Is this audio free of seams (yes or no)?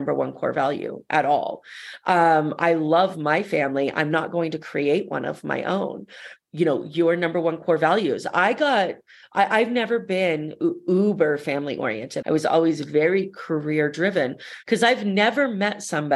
no